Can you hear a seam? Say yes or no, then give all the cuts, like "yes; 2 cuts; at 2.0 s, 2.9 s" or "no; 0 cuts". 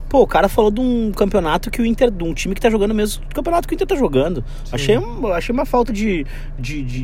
no; 0 cuts